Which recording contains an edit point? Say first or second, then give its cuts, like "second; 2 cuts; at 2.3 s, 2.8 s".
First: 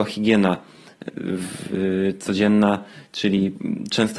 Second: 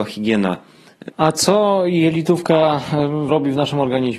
second; 2 cuts; at 1.1 s, 3.3 s